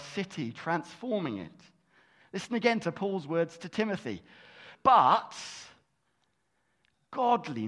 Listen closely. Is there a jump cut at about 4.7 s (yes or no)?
yes